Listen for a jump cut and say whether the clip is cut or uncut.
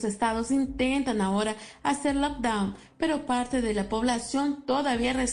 uncut